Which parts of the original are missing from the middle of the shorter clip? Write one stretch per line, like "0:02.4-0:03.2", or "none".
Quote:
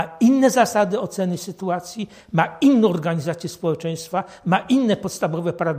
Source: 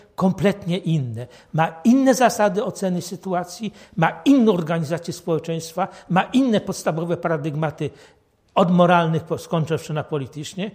none